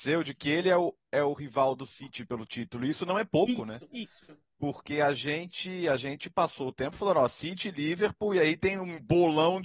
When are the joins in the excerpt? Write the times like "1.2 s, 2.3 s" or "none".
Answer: none